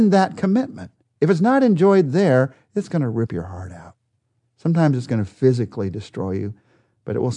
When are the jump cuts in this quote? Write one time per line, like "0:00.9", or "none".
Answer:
none